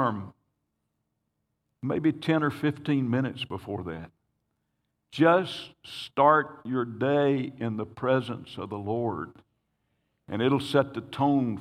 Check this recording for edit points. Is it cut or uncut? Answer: uncut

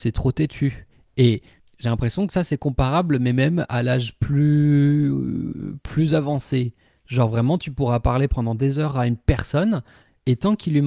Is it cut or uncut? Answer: uncut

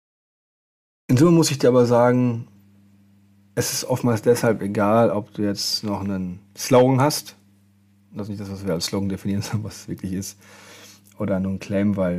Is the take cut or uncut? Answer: uncut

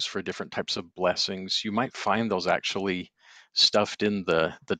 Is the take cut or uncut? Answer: uncut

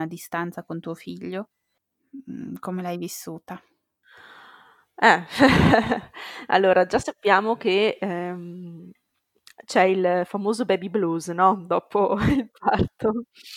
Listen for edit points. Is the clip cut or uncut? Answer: uncut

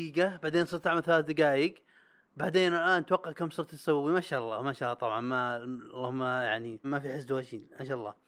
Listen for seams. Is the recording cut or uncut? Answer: cut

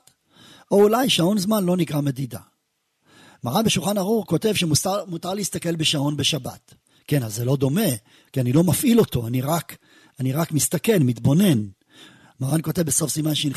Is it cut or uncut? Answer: uncut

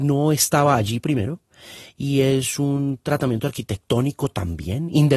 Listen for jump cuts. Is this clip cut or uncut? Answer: uncut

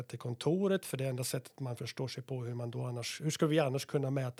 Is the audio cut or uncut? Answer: uncut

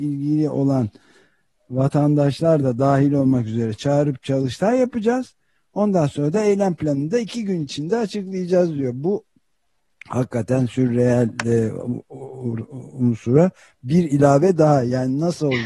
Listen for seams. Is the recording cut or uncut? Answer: uncut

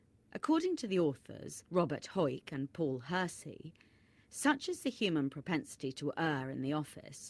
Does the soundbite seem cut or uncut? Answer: cut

